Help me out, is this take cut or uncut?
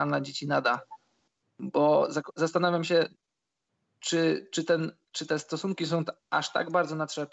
uncut